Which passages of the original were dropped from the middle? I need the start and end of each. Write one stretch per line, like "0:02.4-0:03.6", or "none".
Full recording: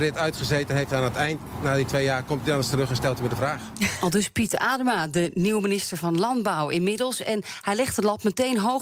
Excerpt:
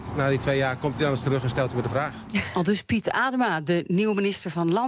none